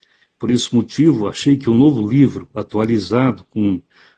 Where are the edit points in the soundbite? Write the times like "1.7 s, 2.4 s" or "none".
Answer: none